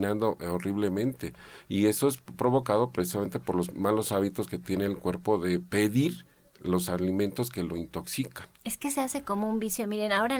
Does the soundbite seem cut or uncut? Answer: cut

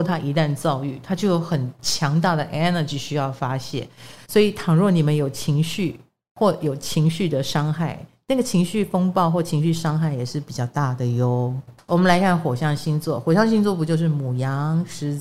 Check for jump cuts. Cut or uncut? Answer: cut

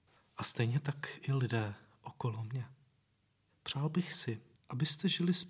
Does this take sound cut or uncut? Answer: cut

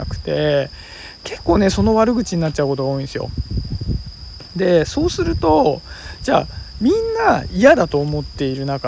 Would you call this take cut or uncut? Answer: uncut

